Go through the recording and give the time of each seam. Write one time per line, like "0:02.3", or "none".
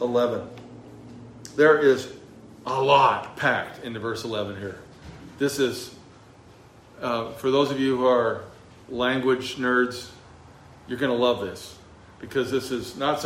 none